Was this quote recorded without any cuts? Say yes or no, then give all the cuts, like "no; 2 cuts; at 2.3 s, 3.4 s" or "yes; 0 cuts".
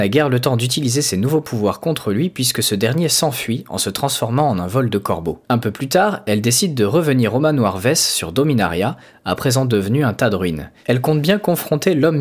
no; 1 cut; at 5.4 s